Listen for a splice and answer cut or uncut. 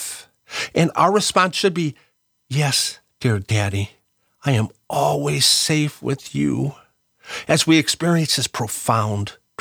uncut